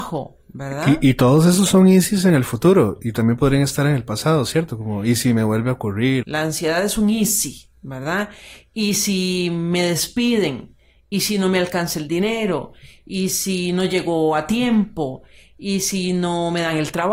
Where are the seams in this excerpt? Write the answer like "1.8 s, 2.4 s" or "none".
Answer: 6.2 s